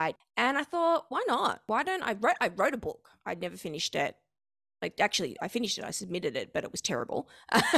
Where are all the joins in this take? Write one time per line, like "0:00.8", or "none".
0:01.1